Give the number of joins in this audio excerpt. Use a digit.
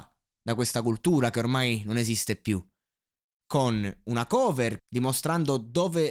2